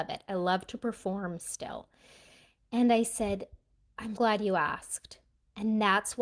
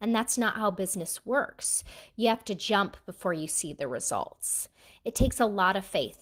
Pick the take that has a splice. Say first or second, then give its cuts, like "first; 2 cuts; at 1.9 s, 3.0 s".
first; 1 cut; at 4.2 s